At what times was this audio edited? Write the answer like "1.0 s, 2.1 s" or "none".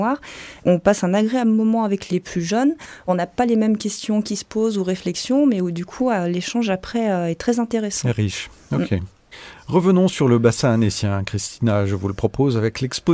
none